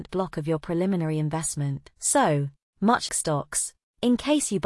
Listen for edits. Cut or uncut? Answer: cut